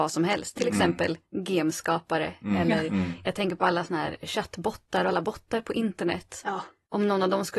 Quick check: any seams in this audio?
no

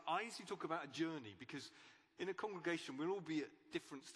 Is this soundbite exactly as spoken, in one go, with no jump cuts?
yes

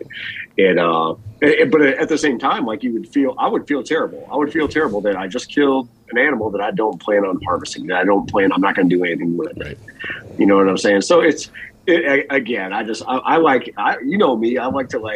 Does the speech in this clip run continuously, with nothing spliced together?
yes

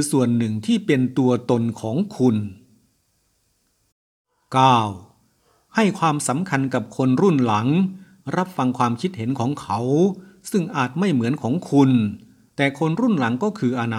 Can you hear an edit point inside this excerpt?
yes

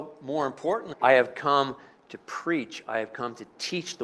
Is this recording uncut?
no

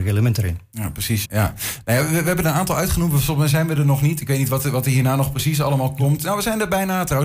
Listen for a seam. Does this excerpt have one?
yes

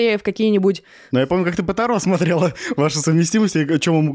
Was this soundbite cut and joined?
no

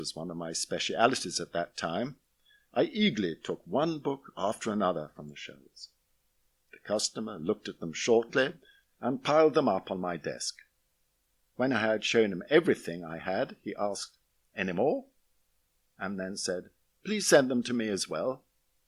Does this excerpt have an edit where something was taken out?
no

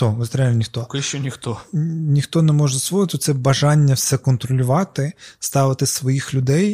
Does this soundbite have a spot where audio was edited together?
no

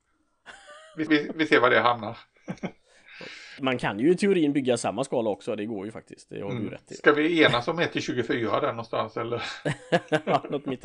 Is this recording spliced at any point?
yes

